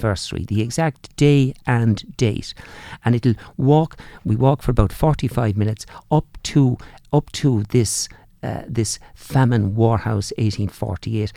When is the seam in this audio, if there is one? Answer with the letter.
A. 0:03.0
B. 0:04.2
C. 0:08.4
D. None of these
D